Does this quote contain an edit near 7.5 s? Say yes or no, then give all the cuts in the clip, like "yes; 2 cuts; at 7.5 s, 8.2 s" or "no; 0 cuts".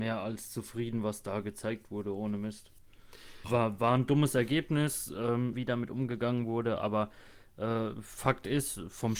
no; 2 cuts; at 3.4 s, 5.5 s